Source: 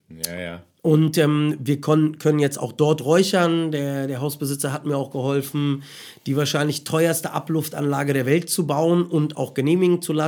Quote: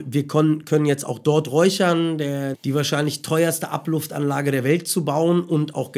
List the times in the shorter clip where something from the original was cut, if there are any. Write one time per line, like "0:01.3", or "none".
0:02.5